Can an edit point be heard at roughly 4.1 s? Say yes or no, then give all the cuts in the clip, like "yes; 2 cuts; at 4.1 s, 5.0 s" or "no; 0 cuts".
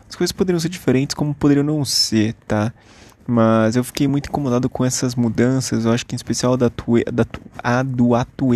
no; 0 cuts